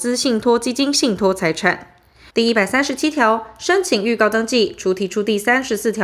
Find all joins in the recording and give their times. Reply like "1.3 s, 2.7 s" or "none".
2.3 s